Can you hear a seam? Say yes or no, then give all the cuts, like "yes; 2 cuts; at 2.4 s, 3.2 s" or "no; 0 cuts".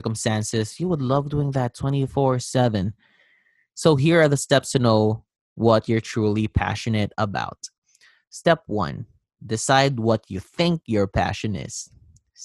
no; 0 cuts